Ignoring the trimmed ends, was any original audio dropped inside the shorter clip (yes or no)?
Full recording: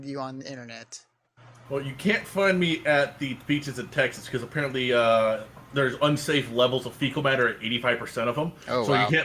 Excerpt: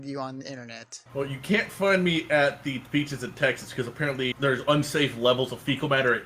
yes